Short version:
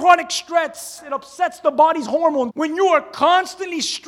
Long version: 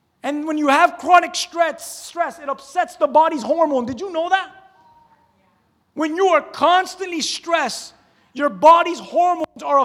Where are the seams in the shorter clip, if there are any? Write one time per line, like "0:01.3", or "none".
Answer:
0:01.0
0:02.5

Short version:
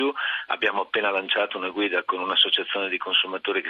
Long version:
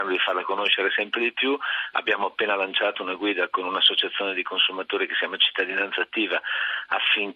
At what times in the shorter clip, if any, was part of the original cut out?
none

